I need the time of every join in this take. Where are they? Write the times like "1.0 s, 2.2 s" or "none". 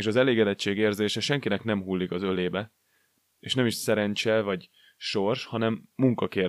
none